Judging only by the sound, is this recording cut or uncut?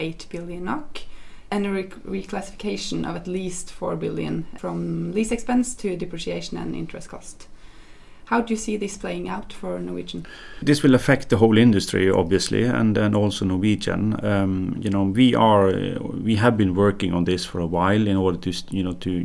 uncut